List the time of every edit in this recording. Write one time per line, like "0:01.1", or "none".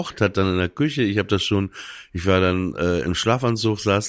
none